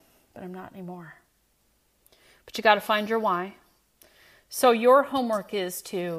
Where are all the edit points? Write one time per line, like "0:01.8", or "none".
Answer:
none